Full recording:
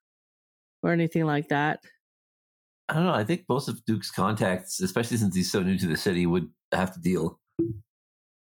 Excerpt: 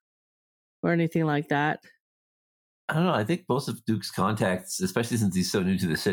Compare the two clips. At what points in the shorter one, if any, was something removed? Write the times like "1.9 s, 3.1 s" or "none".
none